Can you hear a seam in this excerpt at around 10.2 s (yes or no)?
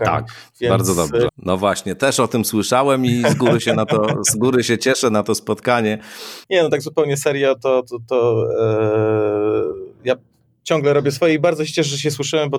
no